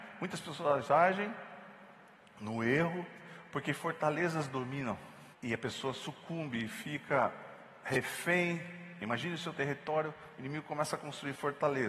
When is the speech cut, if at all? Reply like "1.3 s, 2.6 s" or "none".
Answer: 5.3 s